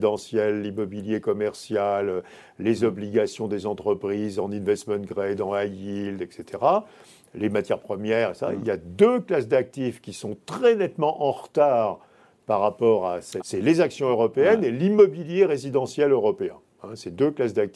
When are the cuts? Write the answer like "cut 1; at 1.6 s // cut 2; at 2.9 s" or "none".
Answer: cut 1; at 13.4 s